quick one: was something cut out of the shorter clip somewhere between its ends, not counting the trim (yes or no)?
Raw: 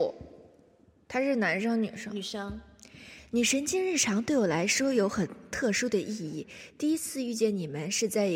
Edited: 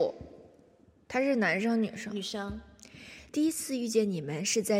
yes